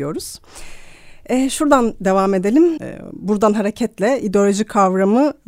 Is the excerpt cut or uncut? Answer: cut